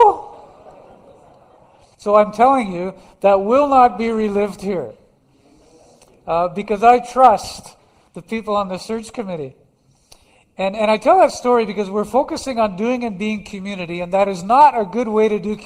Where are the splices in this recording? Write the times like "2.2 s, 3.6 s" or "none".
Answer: 1.9 s